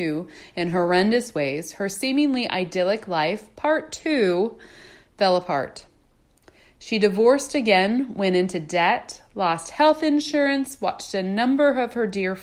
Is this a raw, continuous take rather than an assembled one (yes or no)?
yes